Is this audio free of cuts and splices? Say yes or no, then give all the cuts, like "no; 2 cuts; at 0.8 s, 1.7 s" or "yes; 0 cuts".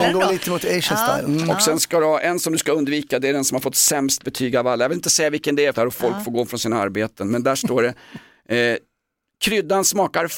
no; 1 cut; at 5.7 s